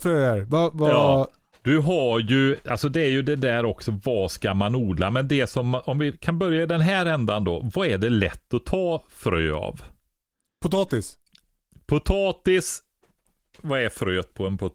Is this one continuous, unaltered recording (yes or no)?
yes